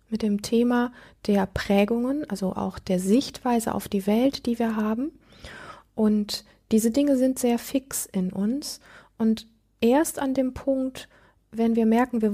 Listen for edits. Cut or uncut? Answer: uncut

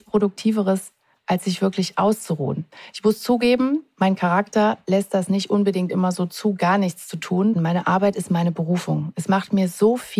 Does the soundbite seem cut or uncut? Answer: cut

